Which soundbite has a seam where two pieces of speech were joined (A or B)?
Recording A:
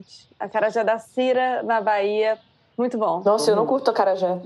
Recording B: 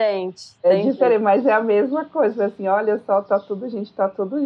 A